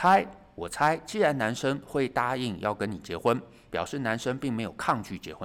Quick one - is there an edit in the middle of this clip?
no; 0 cuts

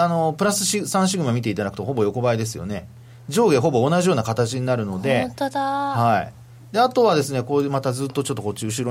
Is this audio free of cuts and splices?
yes; 0 cuts

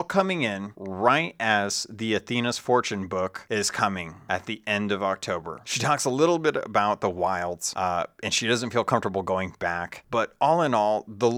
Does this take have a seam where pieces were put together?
yes; 1 cut; at 5.6 s

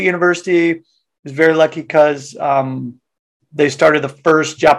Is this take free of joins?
yes; 0 cuts

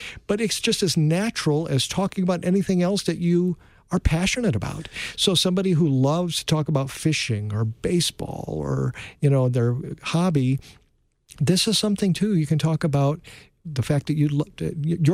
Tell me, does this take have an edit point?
no; 0 cuts

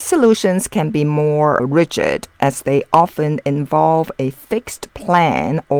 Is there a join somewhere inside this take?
yes; 1 cut; at 1.6 s

